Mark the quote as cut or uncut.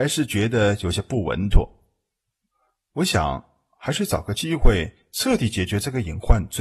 uncut